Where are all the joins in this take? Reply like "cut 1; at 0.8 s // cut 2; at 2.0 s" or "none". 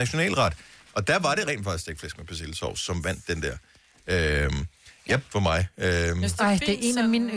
cut 1; at 5.3 s